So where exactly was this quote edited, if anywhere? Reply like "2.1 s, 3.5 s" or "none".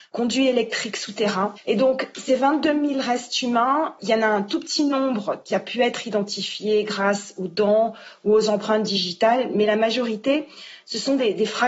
4.0 s